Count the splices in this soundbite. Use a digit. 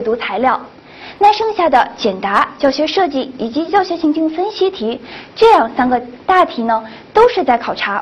1